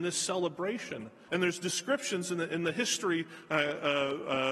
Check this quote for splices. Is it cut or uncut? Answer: cut